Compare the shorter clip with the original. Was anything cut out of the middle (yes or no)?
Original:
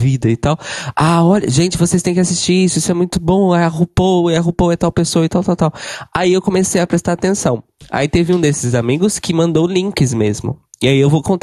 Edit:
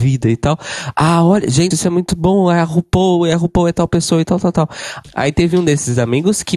yes